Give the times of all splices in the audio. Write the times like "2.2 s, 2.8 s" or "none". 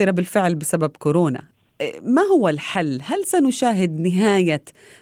none

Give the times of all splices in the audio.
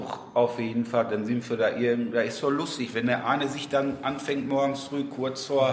none

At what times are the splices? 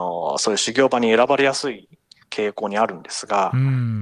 none

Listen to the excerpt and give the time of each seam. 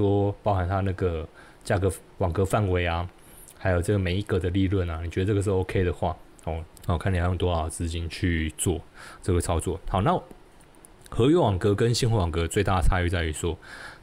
6.7 s

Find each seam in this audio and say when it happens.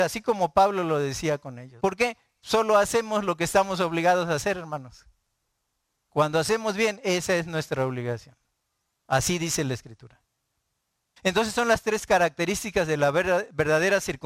1.8 s, 8.9 s, 11.2 s

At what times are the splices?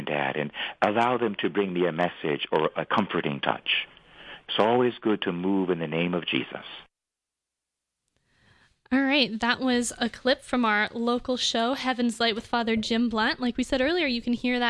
none

